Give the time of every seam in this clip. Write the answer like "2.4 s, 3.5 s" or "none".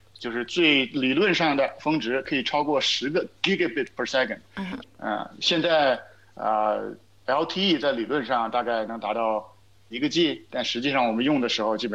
4.8 s